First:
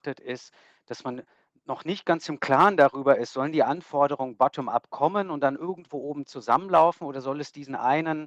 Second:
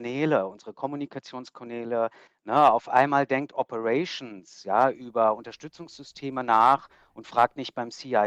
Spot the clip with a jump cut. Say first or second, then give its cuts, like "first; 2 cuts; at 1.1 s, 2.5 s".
second; 1 cut; at 2.3 s